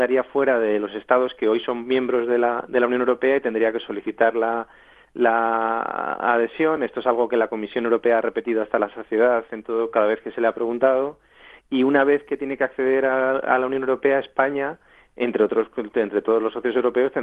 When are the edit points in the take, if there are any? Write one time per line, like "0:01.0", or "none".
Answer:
none